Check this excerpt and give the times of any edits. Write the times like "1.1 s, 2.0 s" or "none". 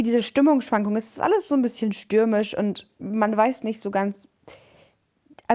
none